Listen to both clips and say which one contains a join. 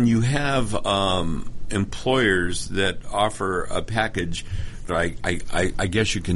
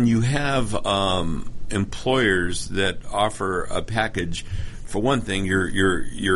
first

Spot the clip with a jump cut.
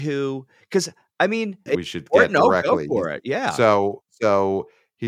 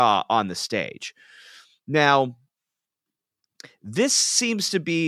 first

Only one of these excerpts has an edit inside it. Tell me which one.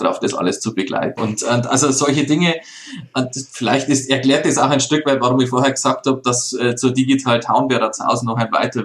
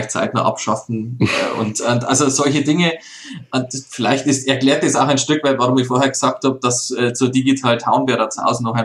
first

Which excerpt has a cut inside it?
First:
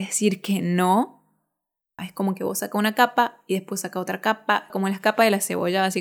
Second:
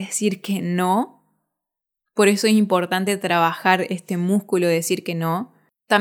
first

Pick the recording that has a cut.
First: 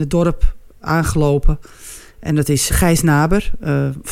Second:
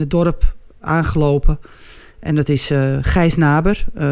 first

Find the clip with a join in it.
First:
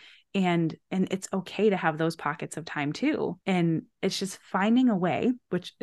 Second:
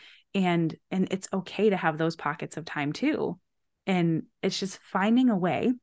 first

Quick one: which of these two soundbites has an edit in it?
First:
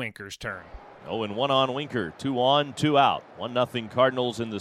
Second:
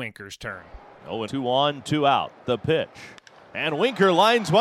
second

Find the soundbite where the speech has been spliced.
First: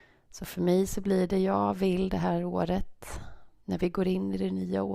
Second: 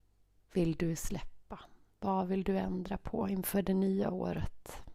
first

